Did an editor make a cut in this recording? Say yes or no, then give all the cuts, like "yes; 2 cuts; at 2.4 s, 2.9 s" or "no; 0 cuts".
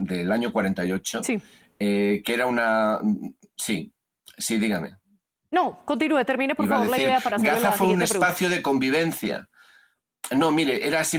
no; 0 cuts